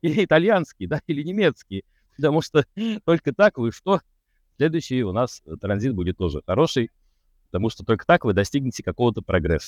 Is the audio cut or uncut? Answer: cut